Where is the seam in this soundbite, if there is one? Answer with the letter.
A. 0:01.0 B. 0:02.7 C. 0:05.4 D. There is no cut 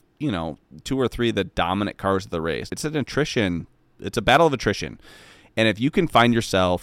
B